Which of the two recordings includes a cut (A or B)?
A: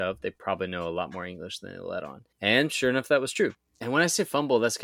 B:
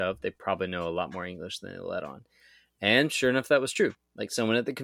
A